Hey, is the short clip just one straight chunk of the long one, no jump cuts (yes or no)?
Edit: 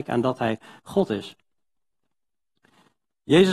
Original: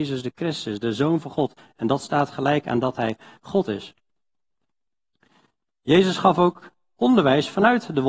yes